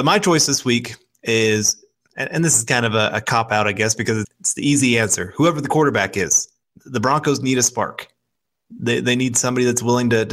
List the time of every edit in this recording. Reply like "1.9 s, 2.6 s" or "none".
4.2 s